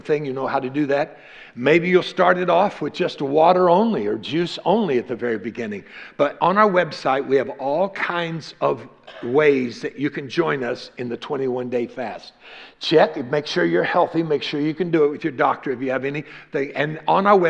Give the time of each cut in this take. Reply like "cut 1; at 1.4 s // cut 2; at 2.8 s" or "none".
none